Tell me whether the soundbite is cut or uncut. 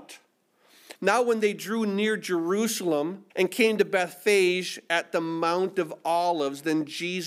cut